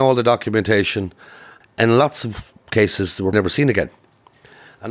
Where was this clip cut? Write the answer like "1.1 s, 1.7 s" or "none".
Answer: 1.6 s, 3.3 s